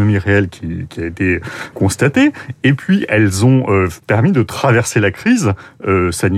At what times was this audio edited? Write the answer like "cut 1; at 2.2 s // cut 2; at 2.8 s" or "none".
cut 1; at 1.7 s